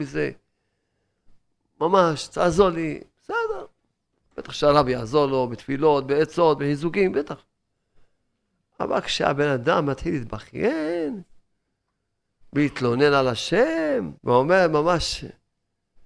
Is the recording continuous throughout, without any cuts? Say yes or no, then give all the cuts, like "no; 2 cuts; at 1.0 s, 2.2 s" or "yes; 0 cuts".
no; 1 cut; at 14.2 s